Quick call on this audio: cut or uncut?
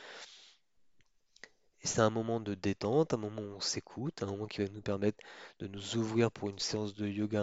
uncut